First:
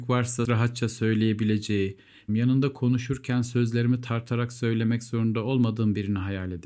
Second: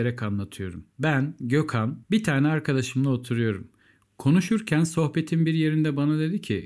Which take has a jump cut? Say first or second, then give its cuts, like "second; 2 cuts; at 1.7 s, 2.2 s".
first; 1 cut; at 2.3 s